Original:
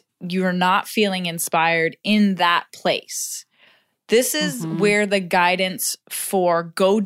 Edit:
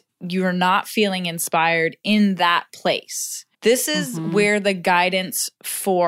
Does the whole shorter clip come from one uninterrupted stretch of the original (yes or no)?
no